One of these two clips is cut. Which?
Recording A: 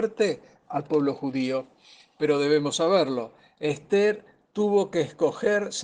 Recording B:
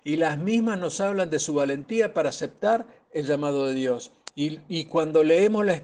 B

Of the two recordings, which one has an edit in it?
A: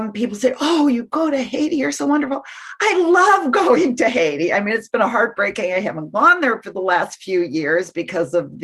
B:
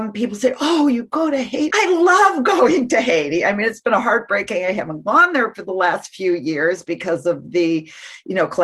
B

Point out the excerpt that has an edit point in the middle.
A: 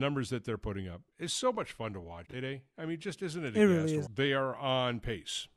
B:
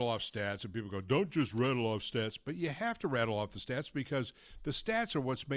A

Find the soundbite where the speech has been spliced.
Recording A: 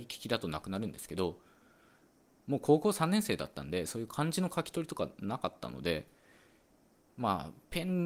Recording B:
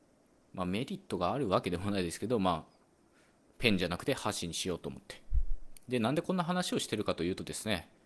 B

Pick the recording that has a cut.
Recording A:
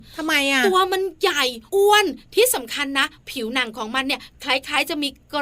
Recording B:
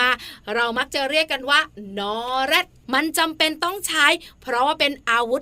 A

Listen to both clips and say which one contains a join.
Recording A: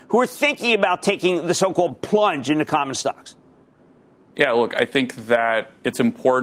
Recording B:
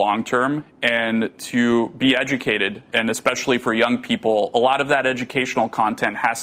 B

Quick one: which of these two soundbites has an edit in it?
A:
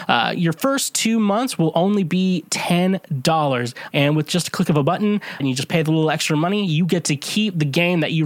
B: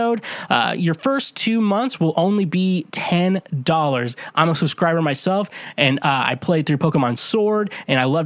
A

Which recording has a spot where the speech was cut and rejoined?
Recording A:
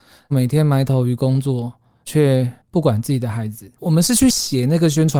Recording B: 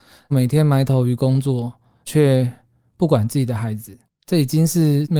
A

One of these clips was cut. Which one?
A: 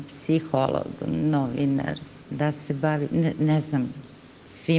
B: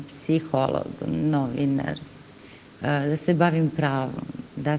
A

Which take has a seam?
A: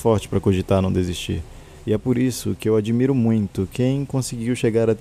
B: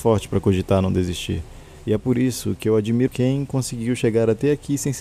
B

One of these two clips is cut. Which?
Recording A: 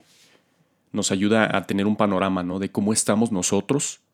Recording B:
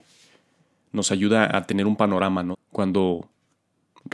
B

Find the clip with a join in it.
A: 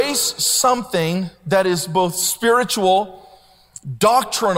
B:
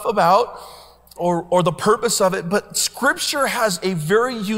B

